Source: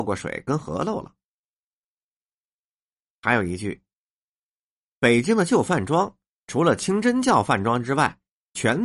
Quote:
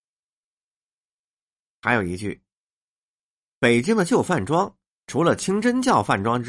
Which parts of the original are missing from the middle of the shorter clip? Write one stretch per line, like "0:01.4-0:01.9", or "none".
none